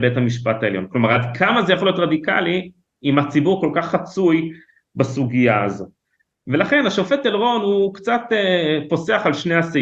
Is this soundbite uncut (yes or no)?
yes